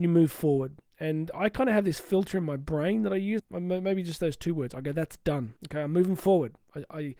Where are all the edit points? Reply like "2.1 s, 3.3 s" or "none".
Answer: 3.4 s, 5.6 s